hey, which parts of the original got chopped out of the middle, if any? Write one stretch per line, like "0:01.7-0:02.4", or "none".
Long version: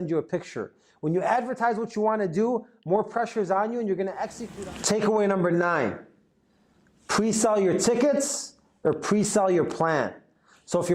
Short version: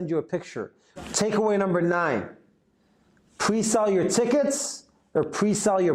0:01.0-0:04.7